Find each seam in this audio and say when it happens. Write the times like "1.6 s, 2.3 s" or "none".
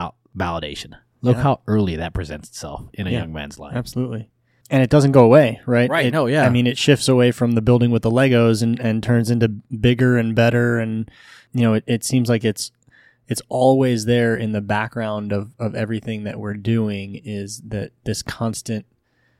none